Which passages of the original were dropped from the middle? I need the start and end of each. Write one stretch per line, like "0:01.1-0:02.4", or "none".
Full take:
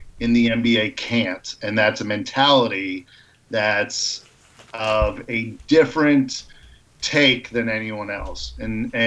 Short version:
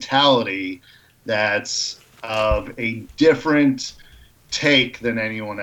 0:04.4-0:04.6